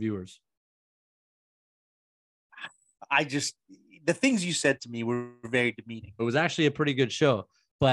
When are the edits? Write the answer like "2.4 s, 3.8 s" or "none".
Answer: 6.2 s